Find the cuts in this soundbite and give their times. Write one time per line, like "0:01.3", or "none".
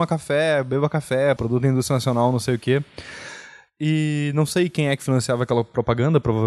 0:01.4